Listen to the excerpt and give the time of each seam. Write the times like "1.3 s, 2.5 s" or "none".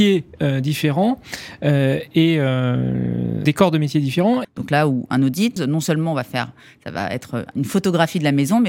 3.4 s, 4.4 s, 5.6 s

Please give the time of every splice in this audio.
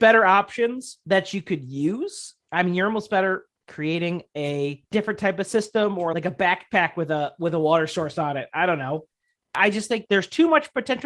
6.1 s

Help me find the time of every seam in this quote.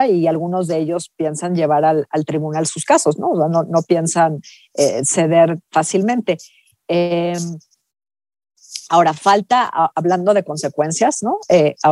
none

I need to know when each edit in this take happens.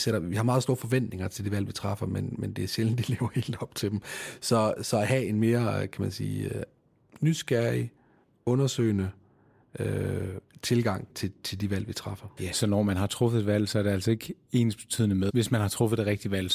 11.1 s, 12.4 s, 15.3 s

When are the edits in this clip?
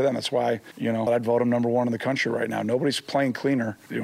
1.1 s

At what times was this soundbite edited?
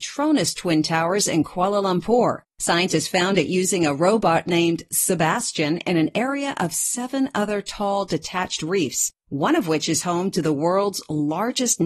2.5 s

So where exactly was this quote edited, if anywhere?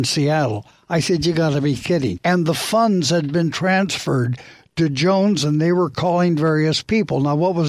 2.2 s

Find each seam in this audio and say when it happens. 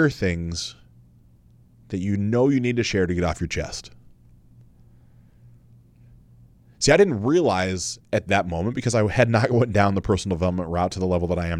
none

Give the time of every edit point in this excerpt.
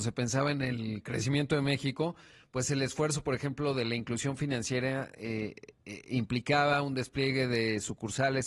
none

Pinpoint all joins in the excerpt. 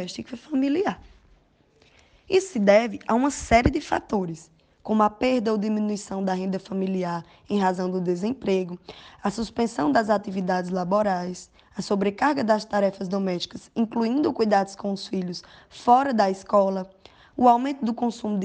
none

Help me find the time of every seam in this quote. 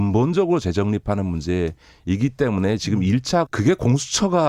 3.5 s

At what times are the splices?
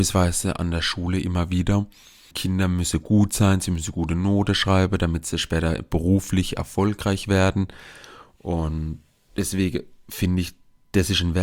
2.3 s

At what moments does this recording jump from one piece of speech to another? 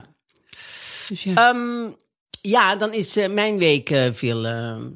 none

